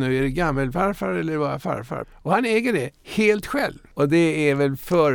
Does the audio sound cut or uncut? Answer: cut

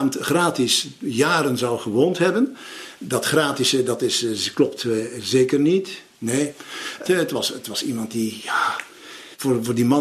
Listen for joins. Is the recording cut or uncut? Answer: cut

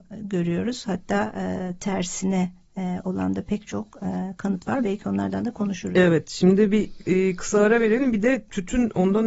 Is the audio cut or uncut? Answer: uncut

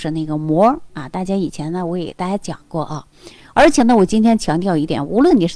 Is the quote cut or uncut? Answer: uncut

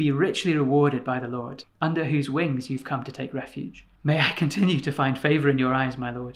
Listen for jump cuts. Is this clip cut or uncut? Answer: cut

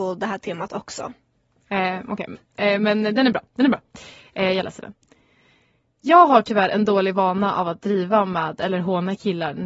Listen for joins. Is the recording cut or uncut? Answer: uncut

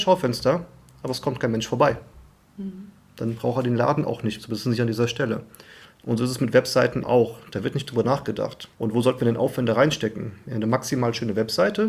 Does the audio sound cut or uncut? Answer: cut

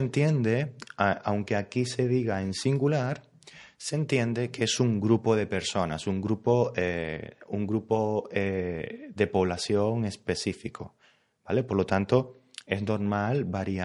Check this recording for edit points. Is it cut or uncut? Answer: cut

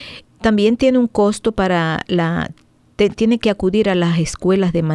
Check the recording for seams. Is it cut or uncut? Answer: uncut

